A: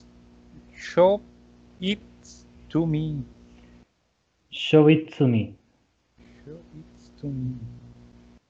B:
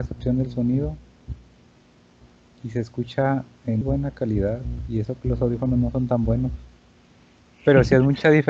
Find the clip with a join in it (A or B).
B